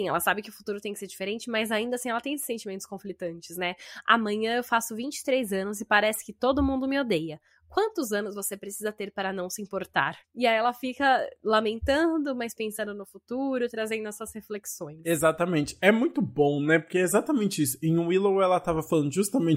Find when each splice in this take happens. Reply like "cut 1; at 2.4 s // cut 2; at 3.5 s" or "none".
cut 1; at 10.2 s